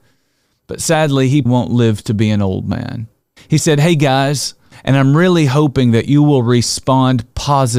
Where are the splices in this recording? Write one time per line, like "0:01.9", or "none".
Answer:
0:01.5
0:03.4
0:04.7